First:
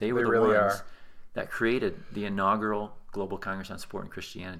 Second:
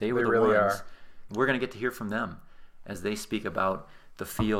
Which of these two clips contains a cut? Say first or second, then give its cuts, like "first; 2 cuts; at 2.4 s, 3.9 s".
second; 1 cut; at 1.3 s